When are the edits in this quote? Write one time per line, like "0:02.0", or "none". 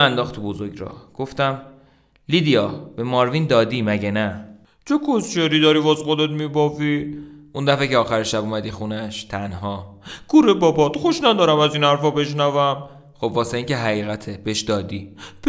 none